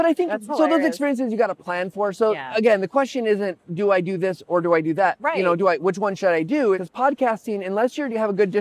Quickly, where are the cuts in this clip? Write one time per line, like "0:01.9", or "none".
0:06.7